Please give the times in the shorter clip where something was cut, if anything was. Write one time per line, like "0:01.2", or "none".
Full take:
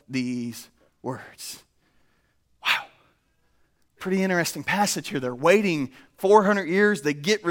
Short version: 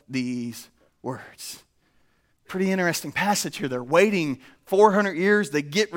0:02.3